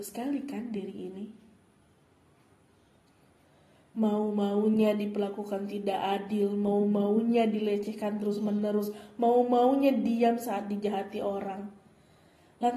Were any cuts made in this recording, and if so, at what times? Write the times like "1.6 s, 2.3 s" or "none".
none